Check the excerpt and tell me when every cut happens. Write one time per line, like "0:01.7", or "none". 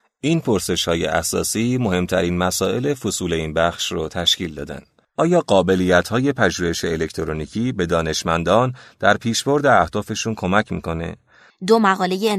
0:11.5